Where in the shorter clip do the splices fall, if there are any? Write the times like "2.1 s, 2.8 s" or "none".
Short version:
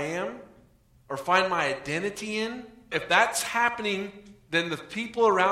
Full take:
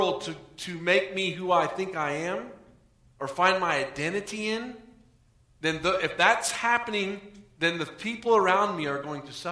2.9 s